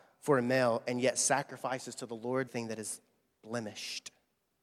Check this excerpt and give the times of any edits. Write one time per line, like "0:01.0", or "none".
0:02.5